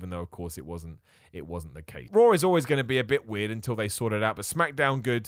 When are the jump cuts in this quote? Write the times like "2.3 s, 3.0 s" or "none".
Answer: 2.1 s